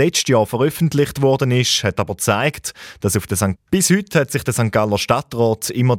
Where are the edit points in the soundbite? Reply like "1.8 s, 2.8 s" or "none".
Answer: 3.6 s